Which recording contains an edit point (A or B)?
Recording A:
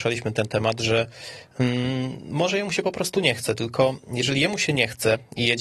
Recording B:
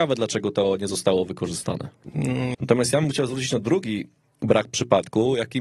B